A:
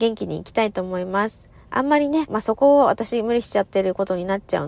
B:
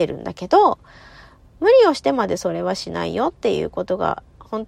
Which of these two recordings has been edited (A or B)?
A